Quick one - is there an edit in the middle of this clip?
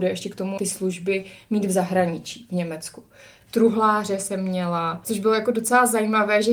yes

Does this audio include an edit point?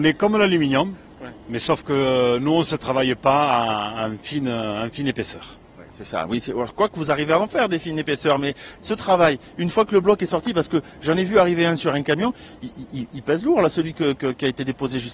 no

